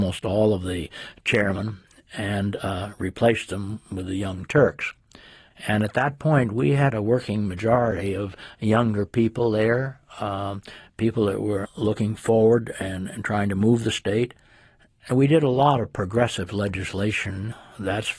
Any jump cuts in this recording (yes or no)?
no